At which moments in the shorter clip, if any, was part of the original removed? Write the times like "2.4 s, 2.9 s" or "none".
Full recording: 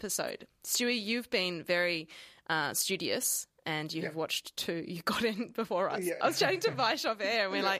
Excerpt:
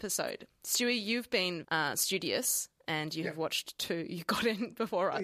1.6 s